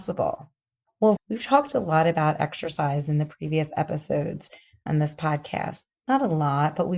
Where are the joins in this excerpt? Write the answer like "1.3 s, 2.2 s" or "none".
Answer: 1.2 s, 4.9 s